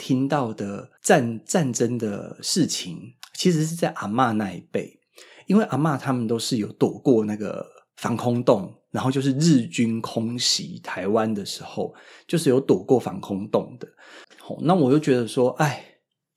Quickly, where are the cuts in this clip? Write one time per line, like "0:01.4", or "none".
0:01.0
0:14.2